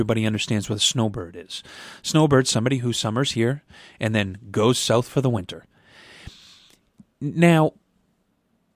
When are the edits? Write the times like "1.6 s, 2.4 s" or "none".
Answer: none